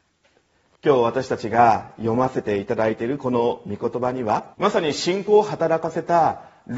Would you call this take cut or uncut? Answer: cut